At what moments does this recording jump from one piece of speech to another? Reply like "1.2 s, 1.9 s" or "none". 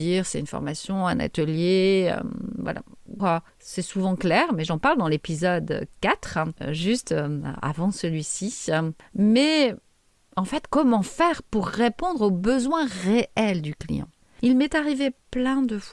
3.2 s